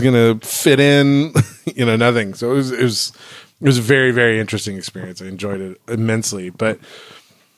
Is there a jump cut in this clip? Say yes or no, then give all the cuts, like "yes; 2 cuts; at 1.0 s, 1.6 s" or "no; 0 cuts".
no; 0 cuts